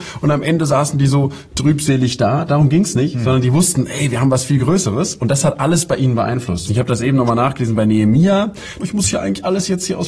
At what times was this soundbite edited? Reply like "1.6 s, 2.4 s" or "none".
6.7 s, 8.8 s